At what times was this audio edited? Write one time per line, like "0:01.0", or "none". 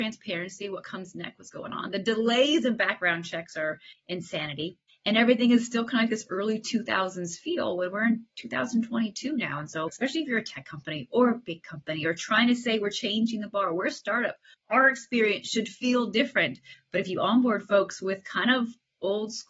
none